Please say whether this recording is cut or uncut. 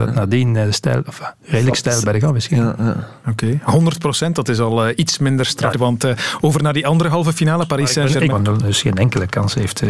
cut